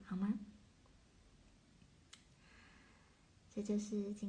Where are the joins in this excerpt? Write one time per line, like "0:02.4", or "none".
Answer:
none